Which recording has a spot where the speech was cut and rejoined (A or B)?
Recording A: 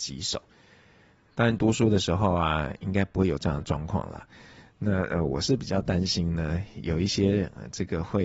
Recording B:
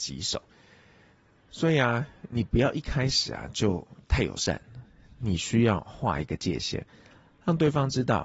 A